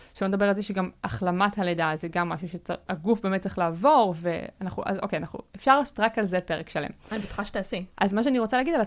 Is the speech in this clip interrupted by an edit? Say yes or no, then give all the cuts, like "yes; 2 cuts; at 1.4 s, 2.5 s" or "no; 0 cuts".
yes; 1 cut; at 7.9 s